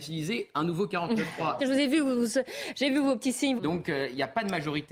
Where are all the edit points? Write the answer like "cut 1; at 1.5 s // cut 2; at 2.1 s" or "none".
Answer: cut 1; at 1.6 s // cut 2; at 3.6 s